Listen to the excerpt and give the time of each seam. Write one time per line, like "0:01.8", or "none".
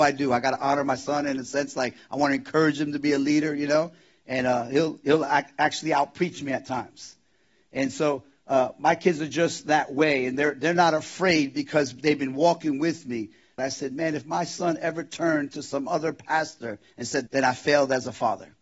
0:13.6
0:17.3